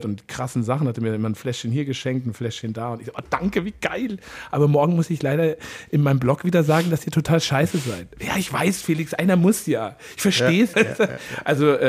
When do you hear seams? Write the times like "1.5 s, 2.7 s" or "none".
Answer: 10.7 s